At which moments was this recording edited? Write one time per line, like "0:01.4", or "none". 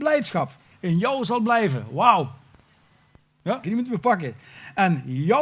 0:03.6